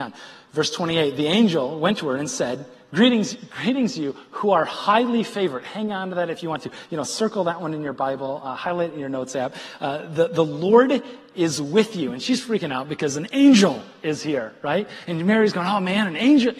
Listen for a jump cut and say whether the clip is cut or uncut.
uncut